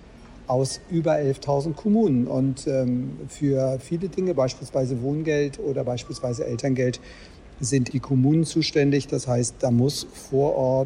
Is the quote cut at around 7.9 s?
yes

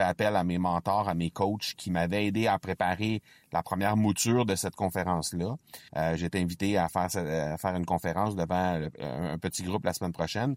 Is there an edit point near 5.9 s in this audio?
yes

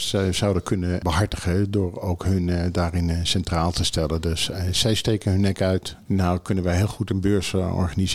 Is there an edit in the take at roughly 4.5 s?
no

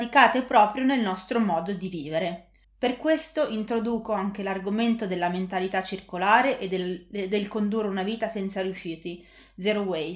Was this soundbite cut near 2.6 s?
yes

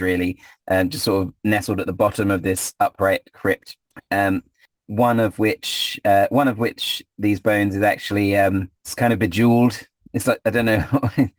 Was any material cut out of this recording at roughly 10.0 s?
no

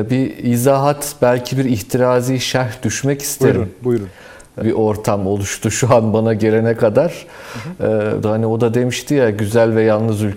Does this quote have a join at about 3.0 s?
no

